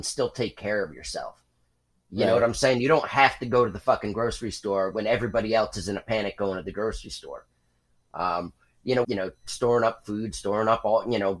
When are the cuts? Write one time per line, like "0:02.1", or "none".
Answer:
0:09.0